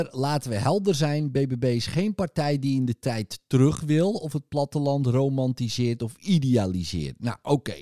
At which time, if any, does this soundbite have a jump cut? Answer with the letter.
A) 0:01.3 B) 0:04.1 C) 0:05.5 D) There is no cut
D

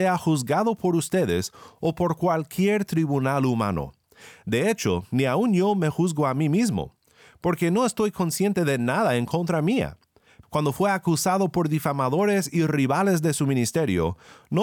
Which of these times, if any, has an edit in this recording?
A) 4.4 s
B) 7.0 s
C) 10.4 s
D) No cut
C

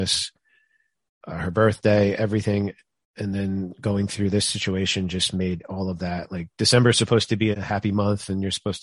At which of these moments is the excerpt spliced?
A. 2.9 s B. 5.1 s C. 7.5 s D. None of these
C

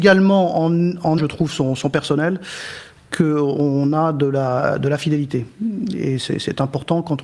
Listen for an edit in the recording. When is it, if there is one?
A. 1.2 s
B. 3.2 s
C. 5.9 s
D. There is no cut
A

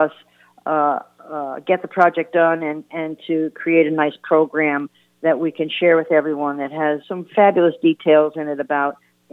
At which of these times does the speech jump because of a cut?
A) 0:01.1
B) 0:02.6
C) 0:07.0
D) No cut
C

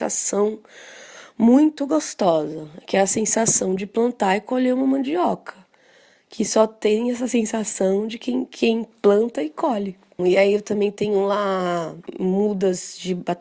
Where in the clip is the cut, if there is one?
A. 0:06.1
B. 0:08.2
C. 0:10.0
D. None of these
D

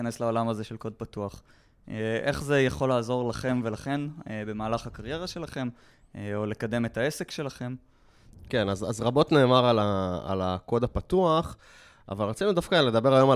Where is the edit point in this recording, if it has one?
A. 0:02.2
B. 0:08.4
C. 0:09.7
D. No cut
D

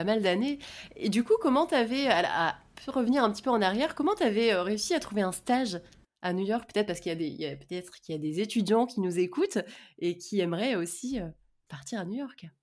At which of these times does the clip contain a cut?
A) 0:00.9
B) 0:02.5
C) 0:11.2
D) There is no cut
D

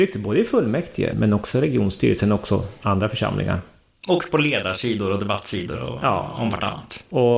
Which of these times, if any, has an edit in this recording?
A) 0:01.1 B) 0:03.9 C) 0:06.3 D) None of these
A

